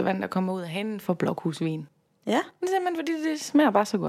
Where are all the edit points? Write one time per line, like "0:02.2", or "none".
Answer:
none